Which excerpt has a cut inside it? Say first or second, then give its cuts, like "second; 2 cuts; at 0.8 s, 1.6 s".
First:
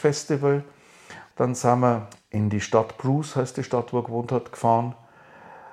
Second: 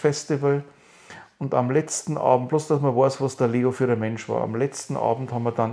first; 1 cut; at 1.3 s